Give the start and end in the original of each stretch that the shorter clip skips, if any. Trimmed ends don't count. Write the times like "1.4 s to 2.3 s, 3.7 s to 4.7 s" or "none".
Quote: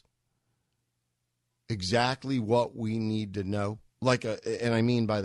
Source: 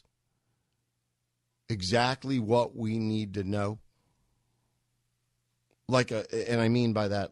3.9 s to 5.8 s